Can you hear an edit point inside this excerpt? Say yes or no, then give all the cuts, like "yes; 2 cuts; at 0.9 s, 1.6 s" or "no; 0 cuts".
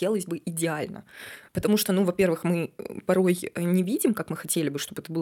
no; 0 cuts